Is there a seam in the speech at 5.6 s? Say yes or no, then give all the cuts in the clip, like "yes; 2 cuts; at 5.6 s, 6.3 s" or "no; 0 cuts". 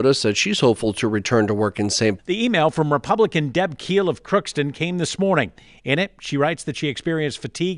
no; 1 cut; at 2.2 s